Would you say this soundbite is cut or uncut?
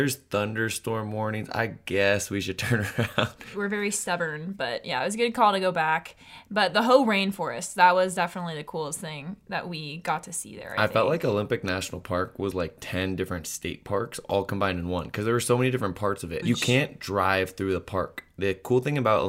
cut